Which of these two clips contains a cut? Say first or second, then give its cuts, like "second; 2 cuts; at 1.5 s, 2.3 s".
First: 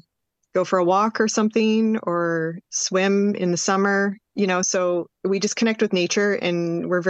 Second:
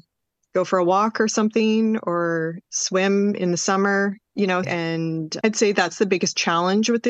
second; 1 cut; at 4.6 s